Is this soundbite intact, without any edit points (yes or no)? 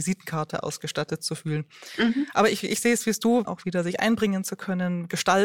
no